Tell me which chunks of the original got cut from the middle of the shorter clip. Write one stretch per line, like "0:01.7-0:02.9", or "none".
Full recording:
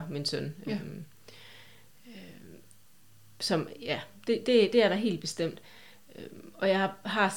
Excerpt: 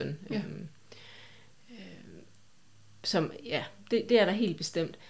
0:04.4-0:04.7